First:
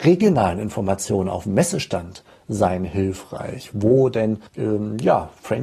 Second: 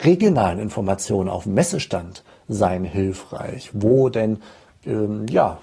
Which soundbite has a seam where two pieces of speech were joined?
first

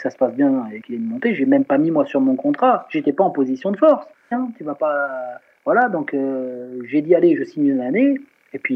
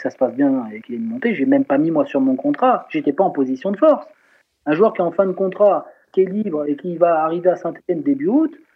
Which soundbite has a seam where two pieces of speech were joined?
first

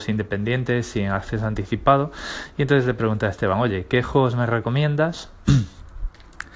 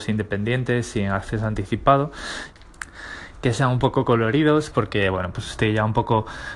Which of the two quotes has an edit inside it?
second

